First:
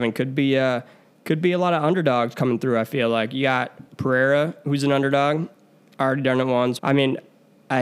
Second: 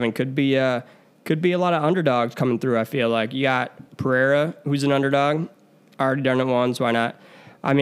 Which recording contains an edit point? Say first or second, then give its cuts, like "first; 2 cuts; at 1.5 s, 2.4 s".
first; 1 cut; at 6.8 s